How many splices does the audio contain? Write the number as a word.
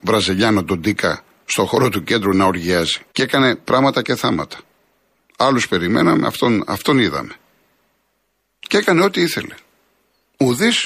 one